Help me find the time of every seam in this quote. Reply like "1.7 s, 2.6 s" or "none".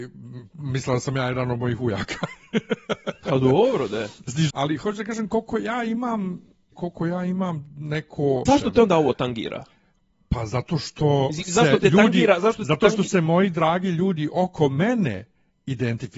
4.5 s, 6.7 s, 8.5 s